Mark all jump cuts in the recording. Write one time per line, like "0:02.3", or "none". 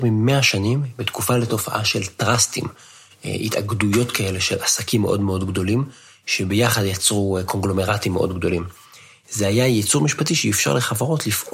none